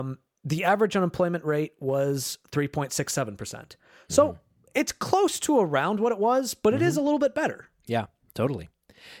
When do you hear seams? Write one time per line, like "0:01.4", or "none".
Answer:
none